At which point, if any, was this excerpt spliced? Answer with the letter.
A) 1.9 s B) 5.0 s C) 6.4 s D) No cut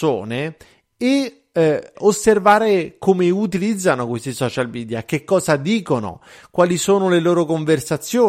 A